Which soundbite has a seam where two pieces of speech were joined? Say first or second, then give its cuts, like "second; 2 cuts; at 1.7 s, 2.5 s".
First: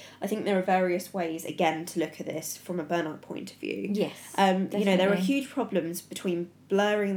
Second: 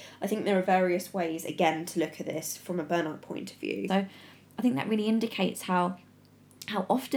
second; 1 cut; at 3.9 s